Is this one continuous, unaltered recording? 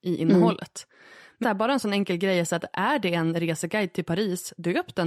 no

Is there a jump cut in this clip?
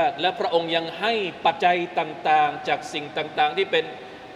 yes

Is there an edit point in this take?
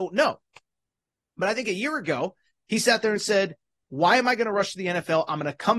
no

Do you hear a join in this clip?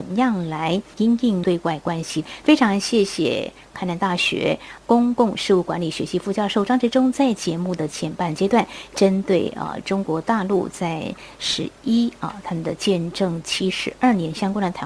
no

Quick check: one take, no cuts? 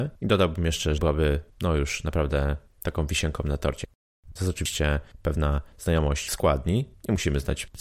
no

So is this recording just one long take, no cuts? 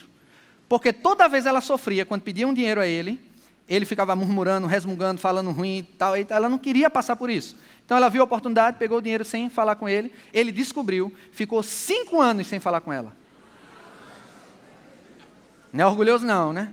yes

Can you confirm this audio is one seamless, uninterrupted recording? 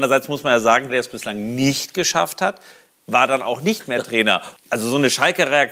no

